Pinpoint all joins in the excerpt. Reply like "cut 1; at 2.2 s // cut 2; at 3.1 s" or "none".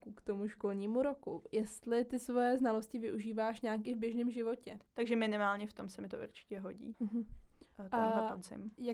cut 1; at 4.9 s // cut 2; at 6.9 s